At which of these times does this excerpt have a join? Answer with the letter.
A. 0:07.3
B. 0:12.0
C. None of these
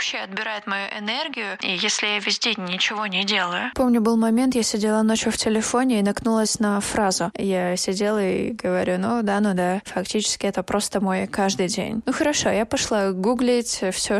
A